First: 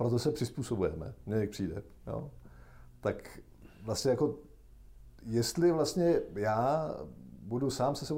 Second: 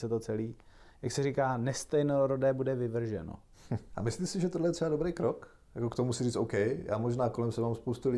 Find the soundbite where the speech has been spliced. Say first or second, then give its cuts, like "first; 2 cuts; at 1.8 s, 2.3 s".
second; 1 cut; at 3.9 s